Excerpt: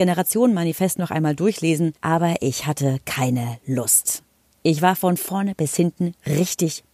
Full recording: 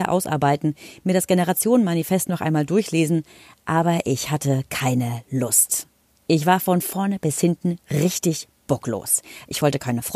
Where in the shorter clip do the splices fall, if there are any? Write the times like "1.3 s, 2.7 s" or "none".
2.0 s